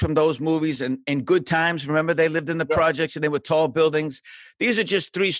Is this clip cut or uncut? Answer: uncut